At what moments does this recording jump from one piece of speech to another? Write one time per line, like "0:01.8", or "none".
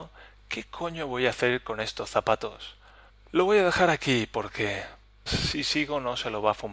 0:03.1
0:05.3